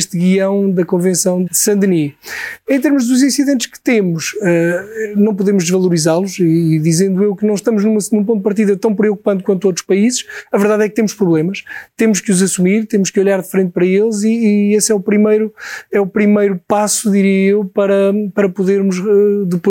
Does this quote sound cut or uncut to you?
cut